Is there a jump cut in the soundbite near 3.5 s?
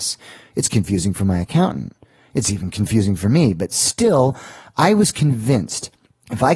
no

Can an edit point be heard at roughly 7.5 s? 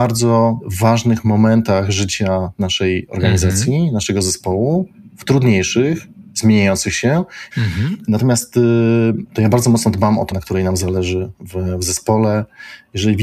yes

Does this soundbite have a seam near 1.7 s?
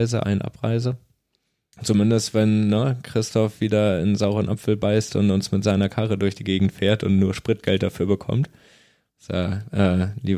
yes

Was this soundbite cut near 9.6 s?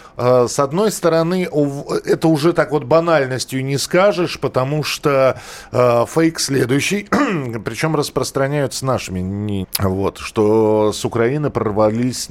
yes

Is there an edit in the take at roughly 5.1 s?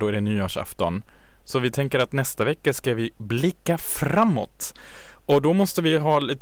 no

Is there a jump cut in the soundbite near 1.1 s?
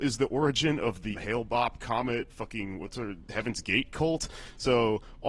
yes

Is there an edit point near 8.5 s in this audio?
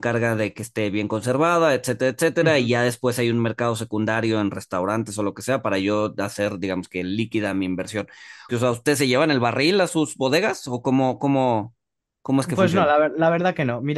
yes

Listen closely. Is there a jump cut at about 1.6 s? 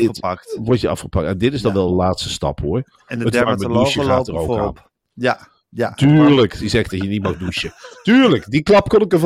no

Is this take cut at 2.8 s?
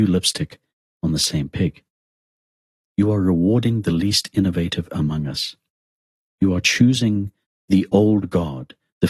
yes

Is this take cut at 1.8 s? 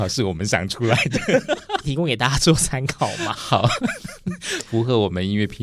yes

